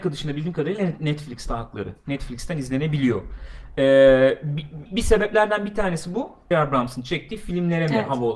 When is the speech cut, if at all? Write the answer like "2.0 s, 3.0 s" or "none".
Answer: 4.9 s, 6.5 s